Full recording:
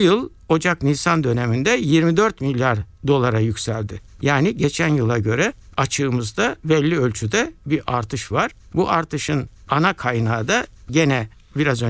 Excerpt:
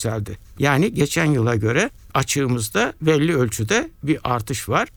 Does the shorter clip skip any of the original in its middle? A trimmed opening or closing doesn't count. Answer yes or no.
no